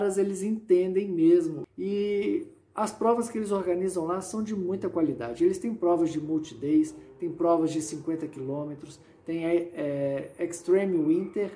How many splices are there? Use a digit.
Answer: 0